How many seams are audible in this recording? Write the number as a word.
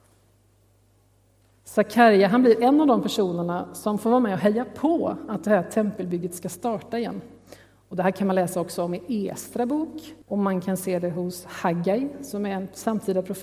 one